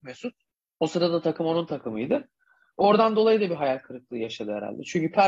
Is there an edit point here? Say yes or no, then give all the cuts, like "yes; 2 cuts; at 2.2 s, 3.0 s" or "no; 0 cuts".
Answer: no; 0 cuts